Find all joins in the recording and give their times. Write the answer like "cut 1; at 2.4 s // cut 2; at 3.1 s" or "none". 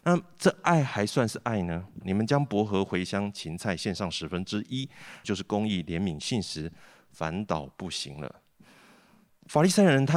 cut 1; at 2.0 s // cut 2; at 5.2 s